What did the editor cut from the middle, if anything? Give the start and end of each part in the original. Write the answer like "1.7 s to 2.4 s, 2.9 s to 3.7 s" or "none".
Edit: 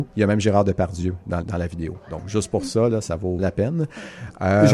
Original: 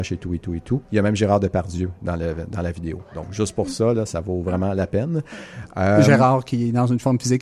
2.2 s to 2.5 s, 4.4 s to 4.7 s